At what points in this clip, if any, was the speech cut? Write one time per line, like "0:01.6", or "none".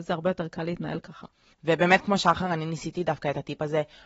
0:01.5

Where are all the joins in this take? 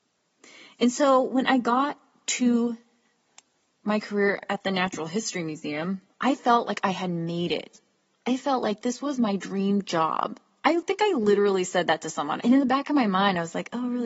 0:12.4

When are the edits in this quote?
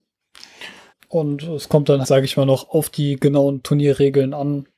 0:00.9
0:02.0

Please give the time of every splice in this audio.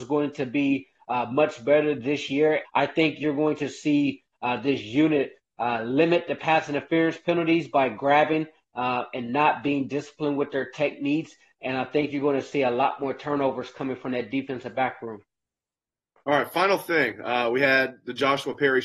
0:02.6

